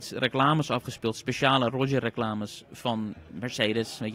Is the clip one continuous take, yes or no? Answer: yes